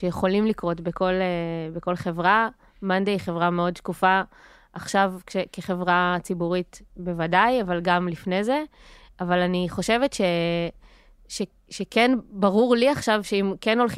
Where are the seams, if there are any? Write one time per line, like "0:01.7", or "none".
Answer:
none